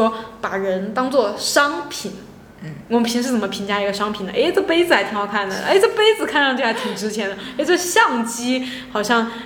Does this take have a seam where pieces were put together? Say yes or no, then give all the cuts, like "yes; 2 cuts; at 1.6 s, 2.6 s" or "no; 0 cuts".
no; 0 cuts